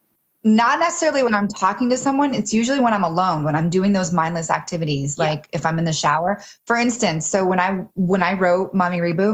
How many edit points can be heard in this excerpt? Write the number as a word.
zero